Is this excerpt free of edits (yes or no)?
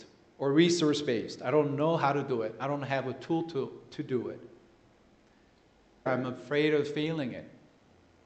no